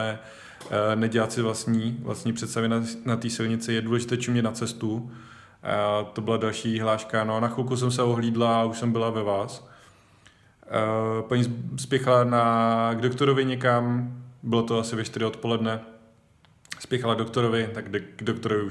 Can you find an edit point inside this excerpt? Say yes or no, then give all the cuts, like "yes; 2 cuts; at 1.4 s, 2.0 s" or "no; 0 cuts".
no; 0 cuts